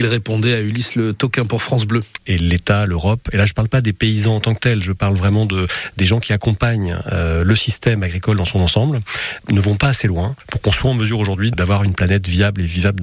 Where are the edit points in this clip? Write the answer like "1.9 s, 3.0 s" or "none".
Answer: 2.2 s